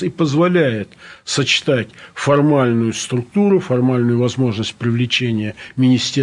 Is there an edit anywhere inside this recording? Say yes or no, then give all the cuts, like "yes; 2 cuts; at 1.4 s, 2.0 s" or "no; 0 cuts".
no; 0 cuts